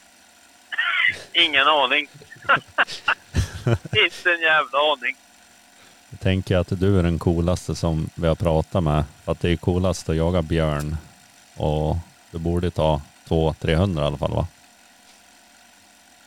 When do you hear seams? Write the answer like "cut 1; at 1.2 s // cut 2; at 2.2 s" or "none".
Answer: none